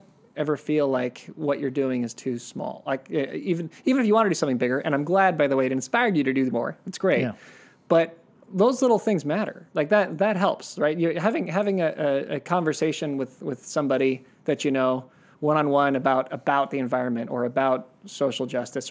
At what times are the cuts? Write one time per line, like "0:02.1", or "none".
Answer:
none